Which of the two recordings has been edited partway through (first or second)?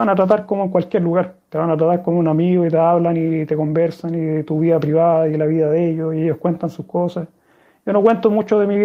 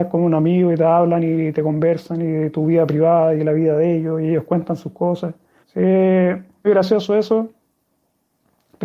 second